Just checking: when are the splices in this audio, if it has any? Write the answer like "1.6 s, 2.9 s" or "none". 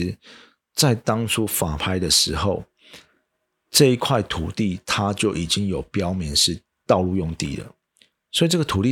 none